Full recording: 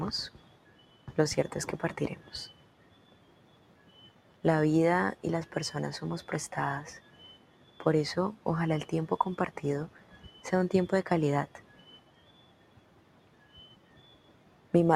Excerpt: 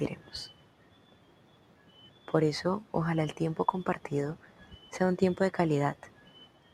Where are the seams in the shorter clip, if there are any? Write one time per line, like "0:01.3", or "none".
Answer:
0:02.1

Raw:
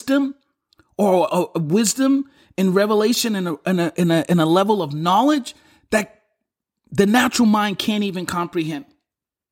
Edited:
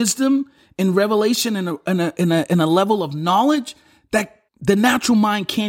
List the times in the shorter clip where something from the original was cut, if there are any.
0:04.5

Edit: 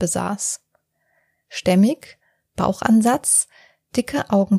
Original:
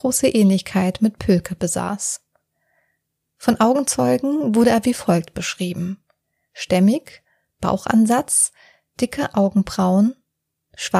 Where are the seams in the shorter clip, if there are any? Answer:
0:01.3

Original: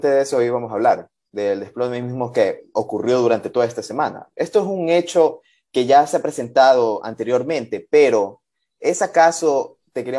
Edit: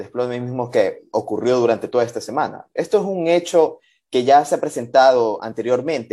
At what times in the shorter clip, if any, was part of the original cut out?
none

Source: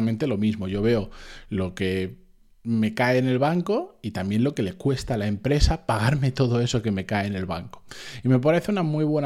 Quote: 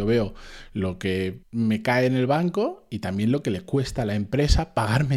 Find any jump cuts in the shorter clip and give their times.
0:01.4

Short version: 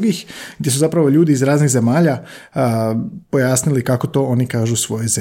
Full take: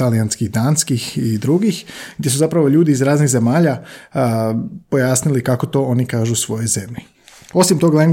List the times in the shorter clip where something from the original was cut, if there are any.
none

